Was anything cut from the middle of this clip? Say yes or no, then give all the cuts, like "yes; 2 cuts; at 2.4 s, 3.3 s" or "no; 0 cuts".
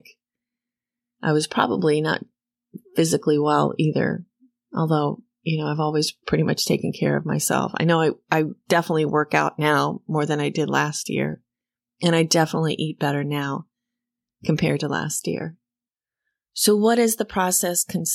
no; 0 cuts